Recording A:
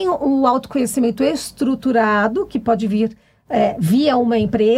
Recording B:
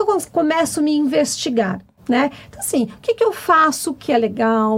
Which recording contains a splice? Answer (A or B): B